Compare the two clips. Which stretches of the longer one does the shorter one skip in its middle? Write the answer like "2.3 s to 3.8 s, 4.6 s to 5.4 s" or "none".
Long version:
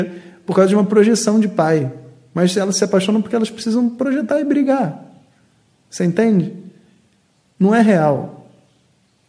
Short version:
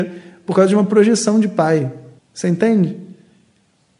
2.2 s to 5.7 s